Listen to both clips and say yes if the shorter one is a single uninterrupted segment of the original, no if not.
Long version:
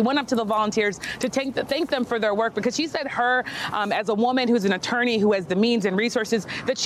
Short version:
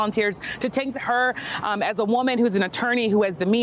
no